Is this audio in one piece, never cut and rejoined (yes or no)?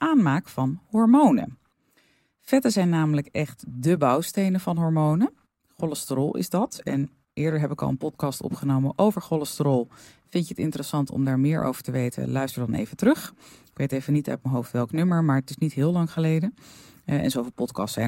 yes